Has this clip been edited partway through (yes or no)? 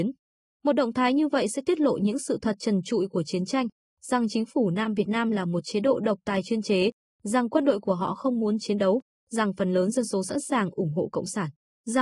no